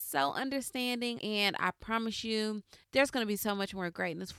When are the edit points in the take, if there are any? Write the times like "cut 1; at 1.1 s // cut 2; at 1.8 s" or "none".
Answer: cut 1; at 1.2 s // cut 2; at 2.8 s